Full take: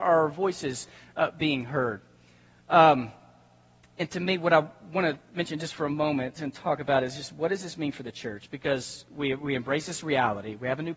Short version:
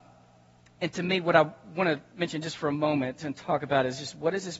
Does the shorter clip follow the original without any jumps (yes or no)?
yes